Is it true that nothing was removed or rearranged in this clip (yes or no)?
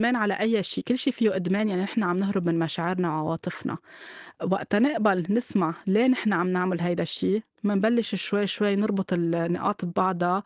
yes